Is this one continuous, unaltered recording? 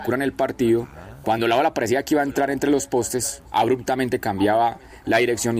yes; 0 cuts

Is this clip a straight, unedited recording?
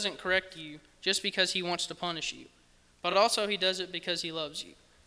yes; 0 cuts

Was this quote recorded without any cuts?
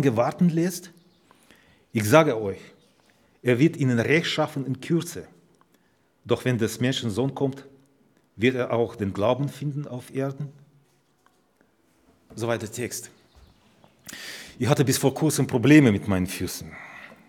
yes; 0 cuts

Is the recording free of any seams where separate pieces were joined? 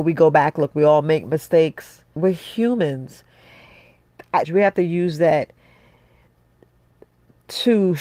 no; 2 cuts; at 2.2 s, 4.4 s

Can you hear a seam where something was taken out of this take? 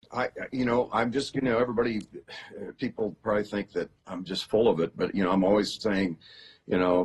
no; 0 cuts

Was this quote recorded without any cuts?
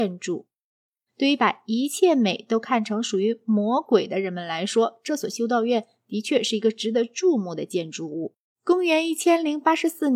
no; 2 cuts; at 1.1 s, 8.5 s

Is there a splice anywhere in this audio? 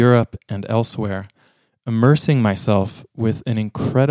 no; 0 cuts

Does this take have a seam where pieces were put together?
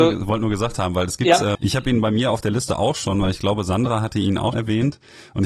yes; 2 cuts; at 1.6 s, 4.5 s

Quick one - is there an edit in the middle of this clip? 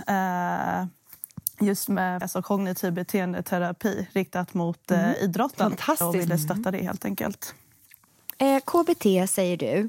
yes; 1 cut; at 2.2 s

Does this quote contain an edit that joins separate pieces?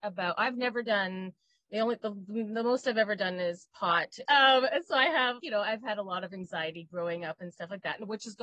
yes; 2 cuts; at 4.2 s, 5.4 s

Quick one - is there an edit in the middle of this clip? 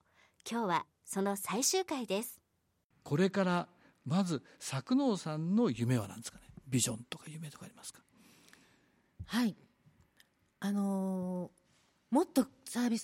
no; 0 cuts

